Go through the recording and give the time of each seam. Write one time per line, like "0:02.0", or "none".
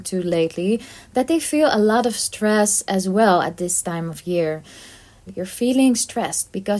0:05.3